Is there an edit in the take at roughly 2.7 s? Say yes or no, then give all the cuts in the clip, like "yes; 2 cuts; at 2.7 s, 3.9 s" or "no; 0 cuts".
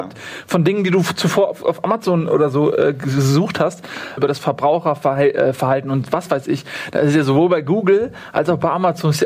no; 1 cut; at 4.2 s